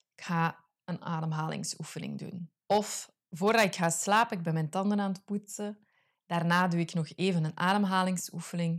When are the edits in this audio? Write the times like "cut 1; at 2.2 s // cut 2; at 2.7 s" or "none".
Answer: cut 1; at 2.6 s